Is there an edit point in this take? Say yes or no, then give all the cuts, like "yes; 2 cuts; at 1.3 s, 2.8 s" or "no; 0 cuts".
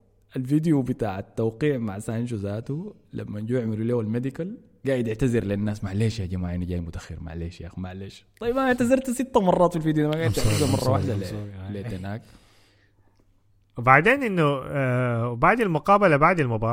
no; 0 cuts